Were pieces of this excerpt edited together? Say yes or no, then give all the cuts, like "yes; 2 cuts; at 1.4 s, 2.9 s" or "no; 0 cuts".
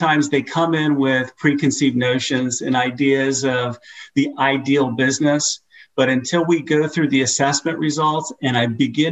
no; 0 cuts